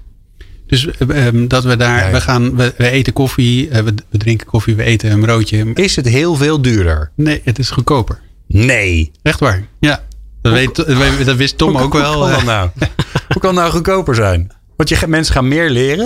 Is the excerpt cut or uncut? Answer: cut